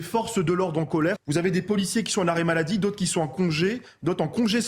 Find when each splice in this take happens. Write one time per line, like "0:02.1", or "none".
0:01.2